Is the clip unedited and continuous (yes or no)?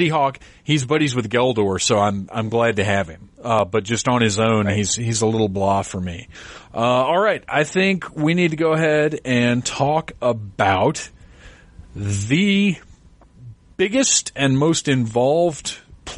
yes